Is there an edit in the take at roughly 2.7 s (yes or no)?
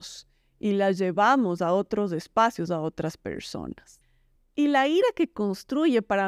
yes